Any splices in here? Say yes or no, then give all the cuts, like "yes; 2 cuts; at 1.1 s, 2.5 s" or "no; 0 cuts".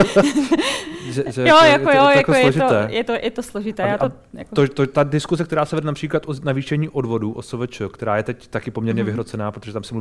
no; 0 cuts